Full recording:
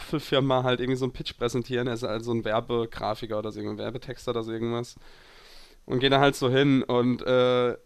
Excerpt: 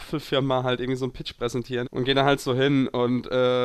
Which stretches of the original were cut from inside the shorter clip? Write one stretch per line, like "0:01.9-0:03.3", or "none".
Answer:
0:01.8-0:05.8